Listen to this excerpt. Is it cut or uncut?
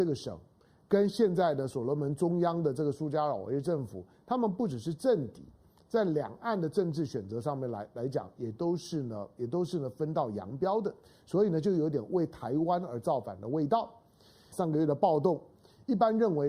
cut